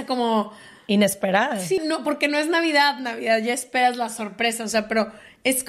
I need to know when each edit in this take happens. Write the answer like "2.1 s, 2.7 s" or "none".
1.8 s